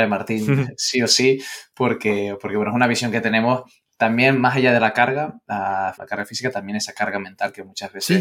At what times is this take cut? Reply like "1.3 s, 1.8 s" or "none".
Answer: 5.9 s

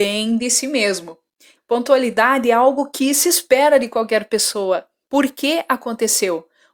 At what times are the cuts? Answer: 1.6 s, 5.0 s

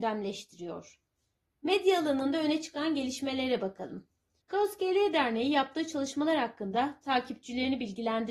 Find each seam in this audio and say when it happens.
4.4 s

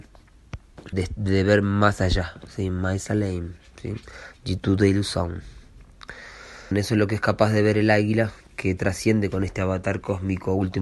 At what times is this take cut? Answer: 0.9 s, 6.7 s

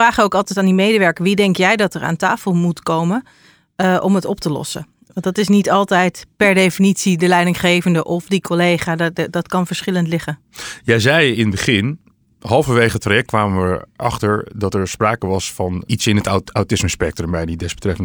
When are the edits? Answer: none

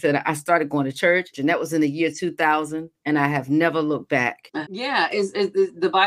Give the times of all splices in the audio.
1.3 s, 4.6 s

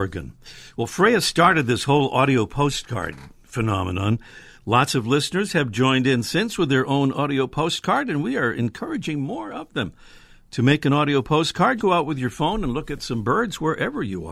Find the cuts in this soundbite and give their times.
11.8 s

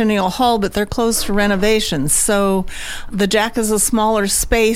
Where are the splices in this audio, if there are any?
3.1 s

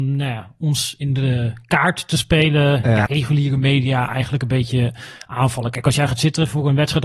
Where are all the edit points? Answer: 3.1 s

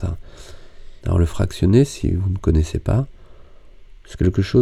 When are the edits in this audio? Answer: 1.0 s

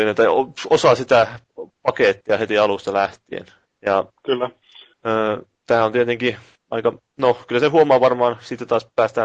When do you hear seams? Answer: none

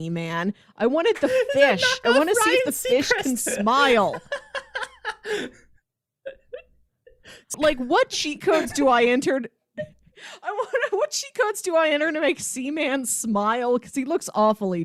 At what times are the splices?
7.5 s

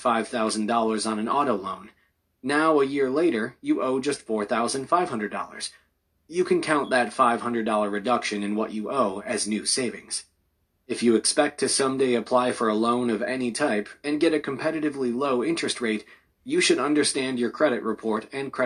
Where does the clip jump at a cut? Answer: 10.8 s

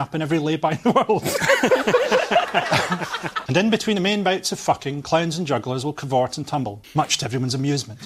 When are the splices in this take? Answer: 3.5 s, 6.8 s

